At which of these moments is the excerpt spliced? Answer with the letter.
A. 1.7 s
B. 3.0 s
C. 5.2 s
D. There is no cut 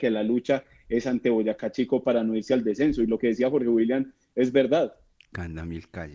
C